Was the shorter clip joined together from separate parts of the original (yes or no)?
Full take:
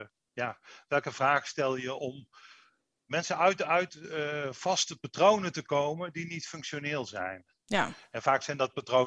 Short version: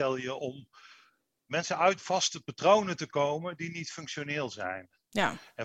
yes